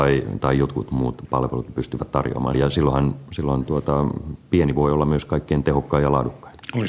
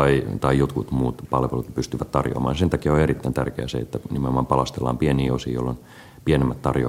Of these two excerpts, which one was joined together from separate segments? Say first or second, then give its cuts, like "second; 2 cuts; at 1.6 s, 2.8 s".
first; 1 cut; at 2.5 s